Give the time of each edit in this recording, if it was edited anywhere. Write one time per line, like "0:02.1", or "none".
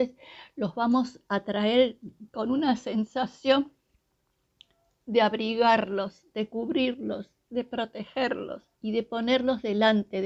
0:08.7